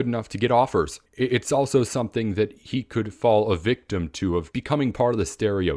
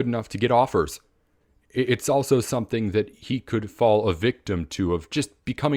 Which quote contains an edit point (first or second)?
first